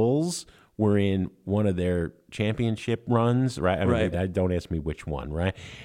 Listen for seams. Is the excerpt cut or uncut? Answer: cut